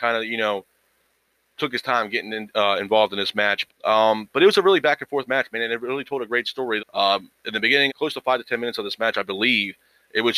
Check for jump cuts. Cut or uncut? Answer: cut